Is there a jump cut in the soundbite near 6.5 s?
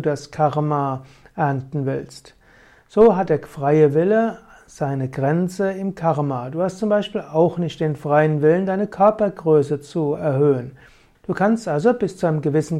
no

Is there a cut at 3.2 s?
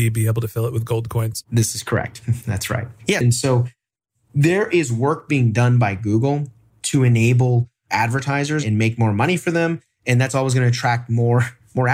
yes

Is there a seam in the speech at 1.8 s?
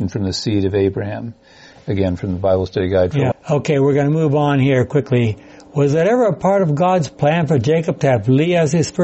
no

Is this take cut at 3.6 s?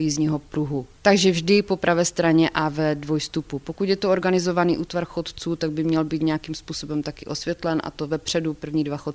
no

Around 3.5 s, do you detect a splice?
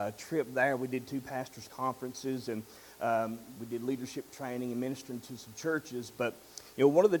yes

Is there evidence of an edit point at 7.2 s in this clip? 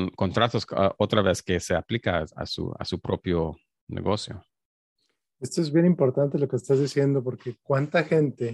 no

